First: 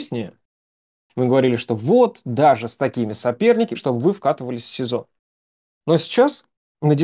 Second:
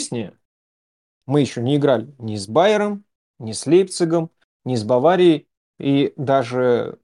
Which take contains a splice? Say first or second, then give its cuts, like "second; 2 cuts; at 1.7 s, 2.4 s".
first; 2 cuts; at 1.1 s, 3.7 s